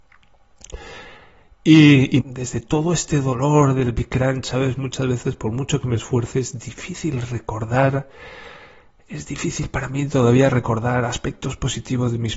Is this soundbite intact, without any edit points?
no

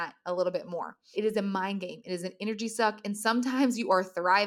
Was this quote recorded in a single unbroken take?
no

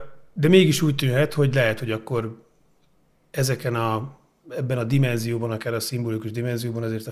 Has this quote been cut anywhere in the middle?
no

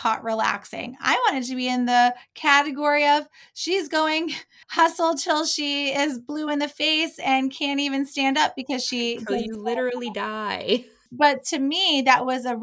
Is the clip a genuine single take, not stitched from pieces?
no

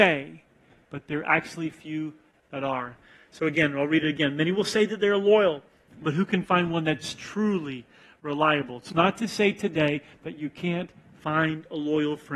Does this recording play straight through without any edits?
yes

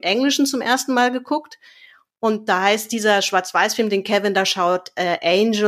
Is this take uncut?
yes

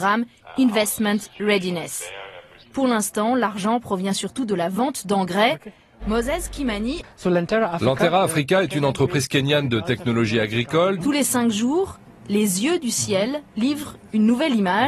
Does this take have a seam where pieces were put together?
yes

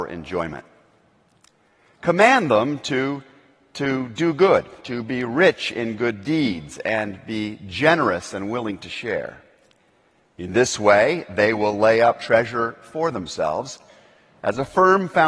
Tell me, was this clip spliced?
no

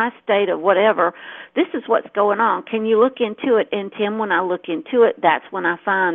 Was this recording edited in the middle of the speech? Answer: no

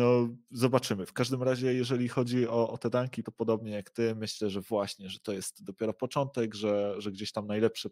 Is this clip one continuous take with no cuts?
no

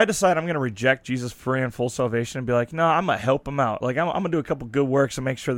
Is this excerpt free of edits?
yes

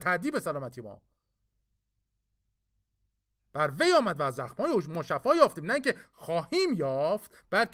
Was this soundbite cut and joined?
no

